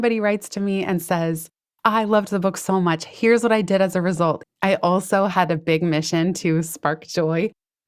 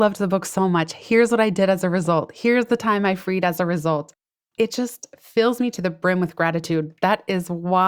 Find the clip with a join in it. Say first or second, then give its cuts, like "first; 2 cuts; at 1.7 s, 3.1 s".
first; 1 cut; at 4.4 s